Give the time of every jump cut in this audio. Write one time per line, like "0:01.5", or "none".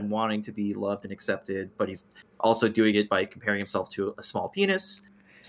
none